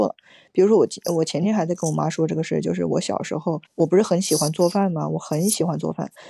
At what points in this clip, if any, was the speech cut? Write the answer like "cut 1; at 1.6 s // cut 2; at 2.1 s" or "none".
cut 1; at 3.7 s